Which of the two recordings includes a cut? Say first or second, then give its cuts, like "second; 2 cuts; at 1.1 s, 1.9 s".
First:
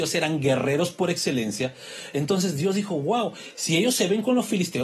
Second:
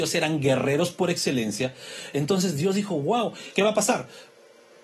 second; 1 cut; at 3.5 s